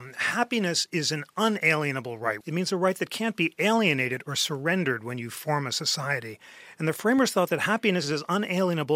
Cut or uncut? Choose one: cut